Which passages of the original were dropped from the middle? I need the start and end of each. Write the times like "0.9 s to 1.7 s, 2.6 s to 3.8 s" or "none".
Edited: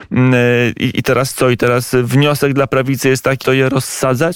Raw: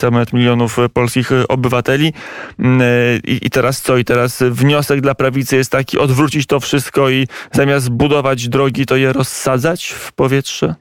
5.9 s to 8.9 s